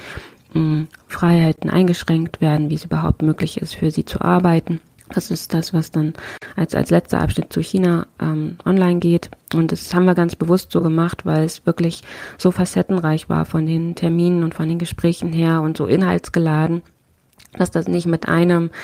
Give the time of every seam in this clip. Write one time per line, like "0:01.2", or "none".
0:07.5